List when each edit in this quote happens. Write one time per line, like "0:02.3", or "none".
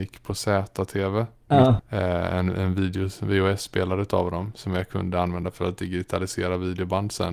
0:01.8